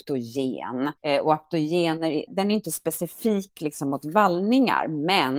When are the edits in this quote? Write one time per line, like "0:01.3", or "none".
0:01.0
0:02.3